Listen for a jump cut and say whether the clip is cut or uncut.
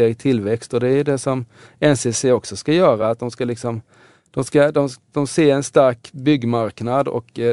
uncut